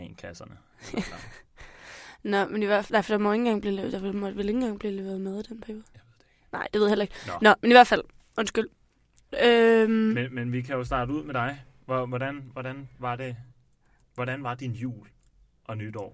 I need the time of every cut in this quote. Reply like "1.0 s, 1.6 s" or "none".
none

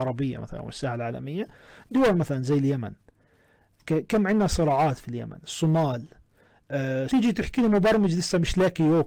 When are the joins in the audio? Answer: 7.1 s

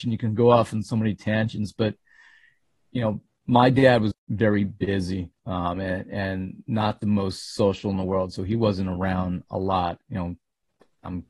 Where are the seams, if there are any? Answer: 4.1 s

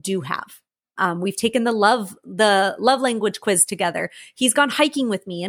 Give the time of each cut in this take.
1.0 s

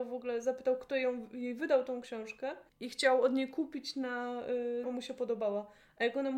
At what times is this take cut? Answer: 2.7 s, 4.8 s

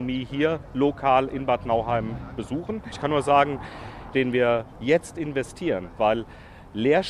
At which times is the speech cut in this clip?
4.1 s, 6.0 s

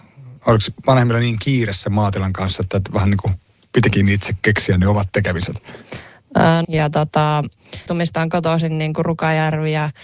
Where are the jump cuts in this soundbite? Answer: 6.6 s, 7.9 s

